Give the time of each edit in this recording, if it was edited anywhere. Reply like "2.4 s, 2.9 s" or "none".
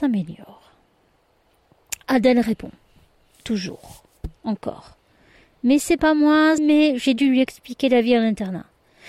6.6 s